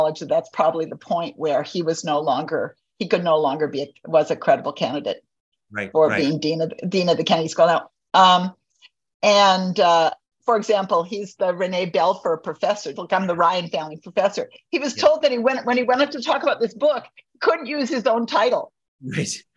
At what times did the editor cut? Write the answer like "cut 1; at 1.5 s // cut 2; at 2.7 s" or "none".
cut 1; at 10.4 s // cut 2; at 13.0 s